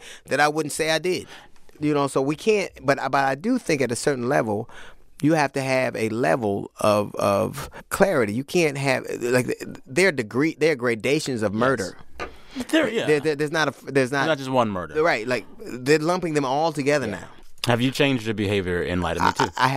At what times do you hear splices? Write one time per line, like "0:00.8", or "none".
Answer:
0:01.8